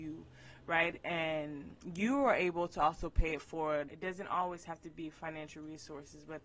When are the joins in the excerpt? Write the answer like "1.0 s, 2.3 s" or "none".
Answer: 3.9 s